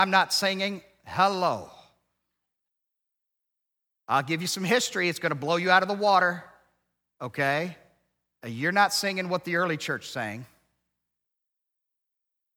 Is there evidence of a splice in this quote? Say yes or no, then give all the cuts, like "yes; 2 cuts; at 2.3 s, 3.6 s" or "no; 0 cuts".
no; 0 cuts